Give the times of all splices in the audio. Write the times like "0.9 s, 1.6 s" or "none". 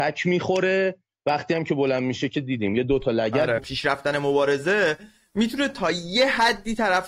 3.6 s